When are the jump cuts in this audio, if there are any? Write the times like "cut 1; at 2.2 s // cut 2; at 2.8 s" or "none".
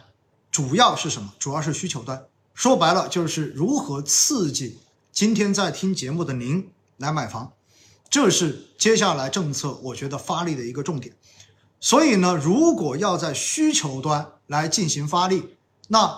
none